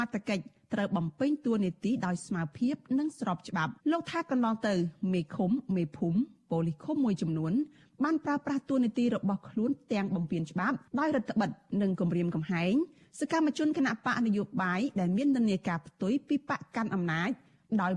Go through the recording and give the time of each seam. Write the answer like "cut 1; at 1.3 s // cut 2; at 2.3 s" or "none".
cut 1; at 3.8 s // cut 2; at 10.9 s